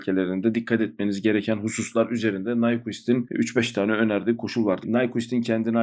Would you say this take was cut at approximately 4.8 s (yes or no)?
yes